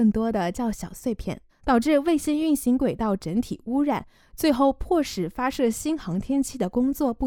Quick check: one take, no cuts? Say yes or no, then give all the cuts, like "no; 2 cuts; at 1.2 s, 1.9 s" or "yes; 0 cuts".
no; 1 cut; at 1.5 s